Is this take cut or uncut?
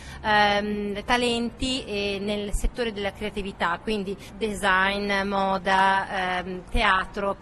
uncut